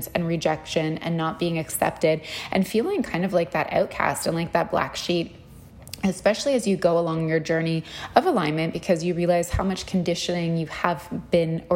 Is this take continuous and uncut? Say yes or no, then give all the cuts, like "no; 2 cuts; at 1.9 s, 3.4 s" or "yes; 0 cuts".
yes; 0 cuts